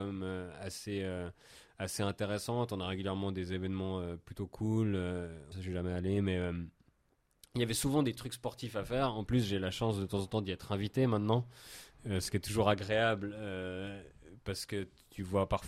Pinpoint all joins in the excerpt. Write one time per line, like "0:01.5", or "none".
0:05.5

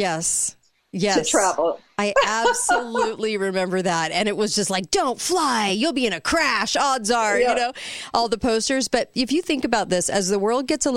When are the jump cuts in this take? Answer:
none

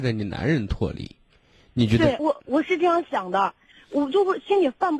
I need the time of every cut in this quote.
0:02.2
0:03.7

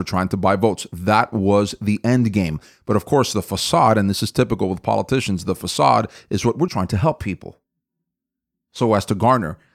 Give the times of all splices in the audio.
0:06.7

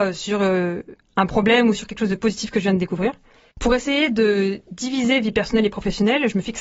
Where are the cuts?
0:03.5

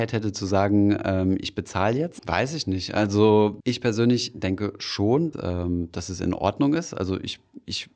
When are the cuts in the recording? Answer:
0:02.2
0:05.3

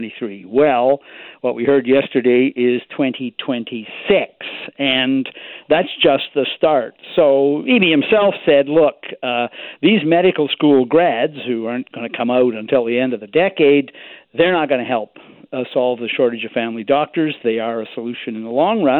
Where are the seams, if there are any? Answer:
none

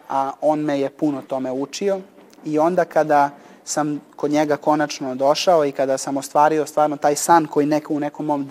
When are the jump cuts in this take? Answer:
0:01.3

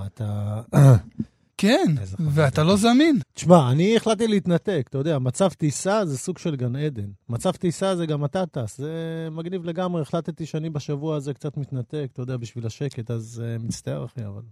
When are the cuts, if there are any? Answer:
0:01.5
0:03.2

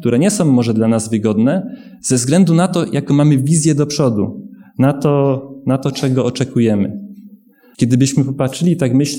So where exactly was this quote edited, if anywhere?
0:07.7

